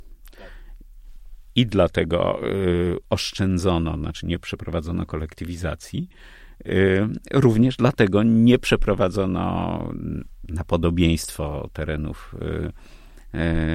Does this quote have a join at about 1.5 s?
yes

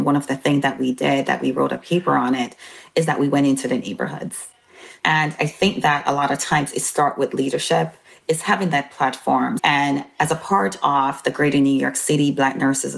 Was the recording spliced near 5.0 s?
yes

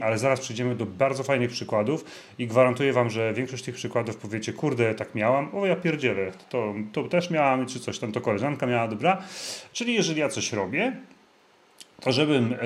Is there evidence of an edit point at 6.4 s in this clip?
no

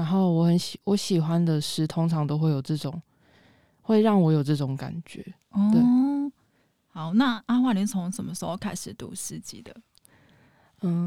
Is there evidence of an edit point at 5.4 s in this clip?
no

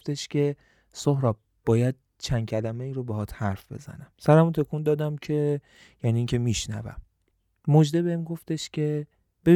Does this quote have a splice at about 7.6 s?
no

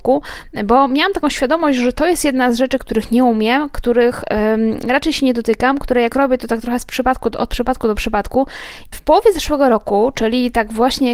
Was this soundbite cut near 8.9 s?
yes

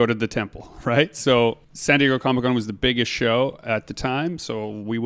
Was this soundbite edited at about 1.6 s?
yes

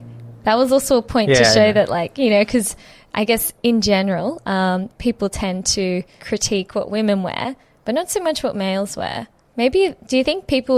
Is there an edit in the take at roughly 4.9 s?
no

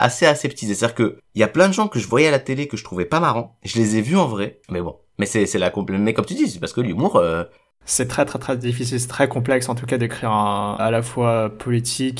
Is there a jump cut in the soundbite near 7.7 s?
no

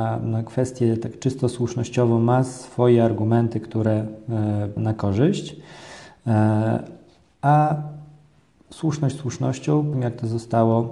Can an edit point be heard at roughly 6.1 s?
no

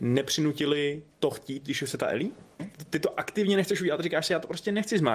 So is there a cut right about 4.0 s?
no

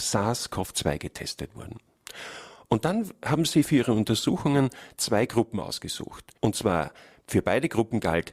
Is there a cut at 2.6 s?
no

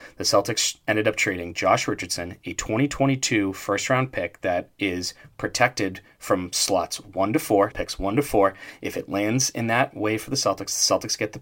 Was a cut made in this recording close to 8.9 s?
no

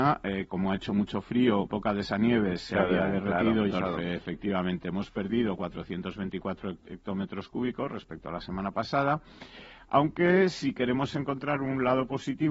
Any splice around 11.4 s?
no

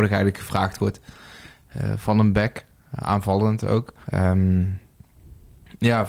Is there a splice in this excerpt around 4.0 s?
yes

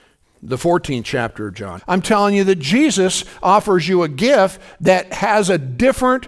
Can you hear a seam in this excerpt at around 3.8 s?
no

